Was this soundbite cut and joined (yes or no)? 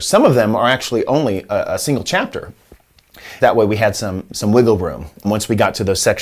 yes